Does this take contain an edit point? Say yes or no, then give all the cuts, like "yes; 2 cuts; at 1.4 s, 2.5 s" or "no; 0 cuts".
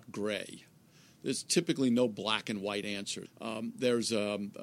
yes; 1 cut; at 3.3 s